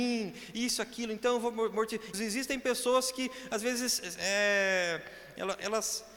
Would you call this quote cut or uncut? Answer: cut